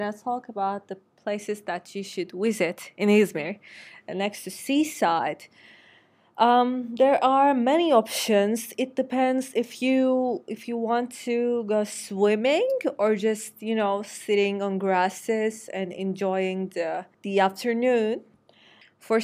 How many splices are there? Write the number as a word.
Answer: one